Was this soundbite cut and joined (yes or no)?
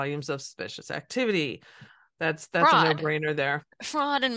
no